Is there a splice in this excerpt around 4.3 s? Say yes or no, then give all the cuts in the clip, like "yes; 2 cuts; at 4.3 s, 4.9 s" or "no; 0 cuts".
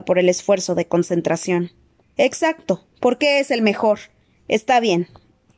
yes; 2 cuts; at 2.0 s, 4.3 s